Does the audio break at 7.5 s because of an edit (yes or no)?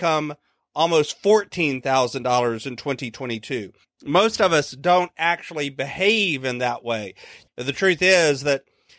yes